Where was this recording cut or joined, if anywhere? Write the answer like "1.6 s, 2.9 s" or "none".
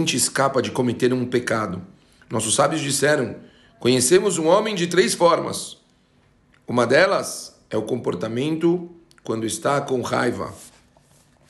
none